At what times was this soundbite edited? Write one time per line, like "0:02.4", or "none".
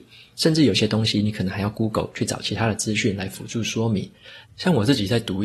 0:04.4